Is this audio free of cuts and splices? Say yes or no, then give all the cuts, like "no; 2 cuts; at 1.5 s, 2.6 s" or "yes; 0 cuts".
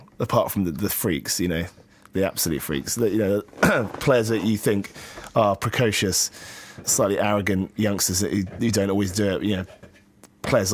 no; 1 cut; at 6.8 s